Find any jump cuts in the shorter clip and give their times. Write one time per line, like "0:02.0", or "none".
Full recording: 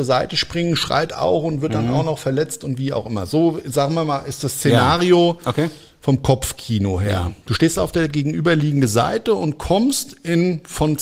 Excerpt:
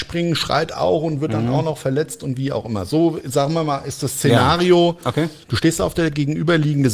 0:05.4